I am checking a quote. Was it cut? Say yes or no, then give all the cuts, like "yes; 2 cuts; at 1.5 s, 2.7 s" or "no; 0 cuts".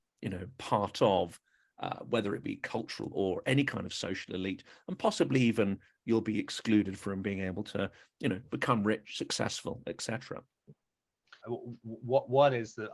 yes; 2 cuts; at 3.1 s, 11.4 s